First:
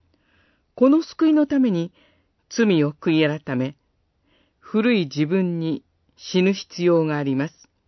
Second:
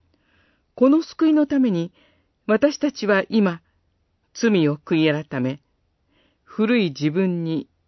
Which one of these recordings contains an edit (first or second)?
first